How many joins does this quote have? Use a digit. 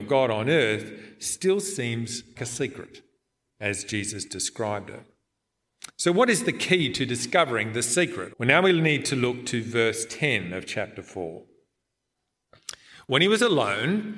2